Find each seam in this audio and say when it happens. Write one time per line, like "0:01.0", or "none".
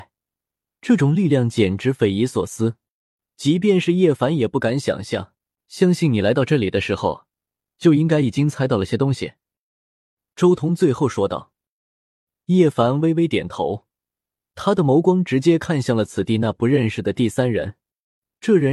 0:05.6